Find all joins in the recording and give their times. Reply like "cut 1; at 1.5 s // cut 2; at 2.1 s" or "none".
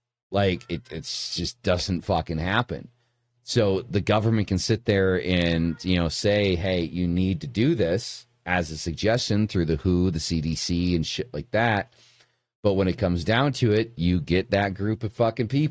none